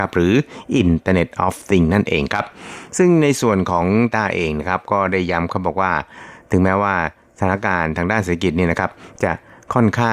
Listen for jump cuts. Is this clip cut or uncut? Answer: cut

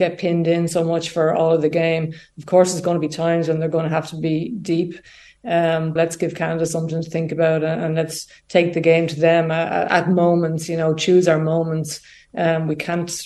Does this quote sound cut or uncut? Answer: cut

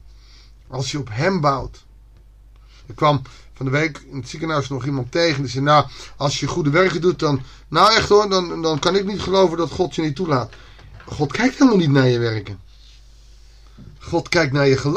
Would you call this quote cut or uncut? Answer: uncut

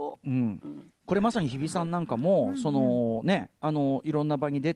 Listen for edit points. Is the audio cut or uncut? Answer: uncut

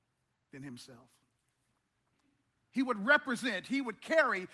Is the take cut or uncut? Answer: uncut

